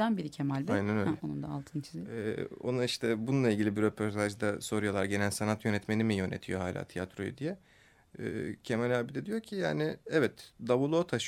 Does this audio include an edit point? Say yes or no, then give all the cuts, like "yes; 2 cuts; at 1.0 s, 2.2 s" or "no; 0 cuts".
no; 0 cuts